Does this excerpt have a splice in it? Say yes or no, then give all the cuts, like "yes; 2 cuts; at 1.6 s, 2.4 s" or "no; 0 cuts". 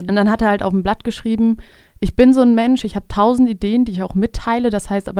no; 0 cuts